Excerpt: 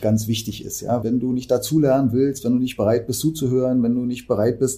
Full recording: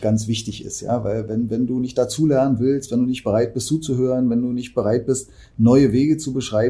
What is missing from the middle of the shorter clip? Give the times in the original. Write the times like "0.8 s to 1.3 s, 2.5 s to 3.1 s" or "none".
1.0 s to 1.5 s

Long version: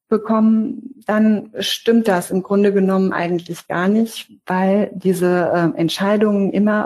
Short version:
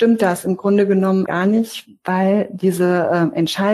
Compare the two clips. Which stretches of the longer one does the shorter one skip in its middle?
3.1 s to 3.7 s

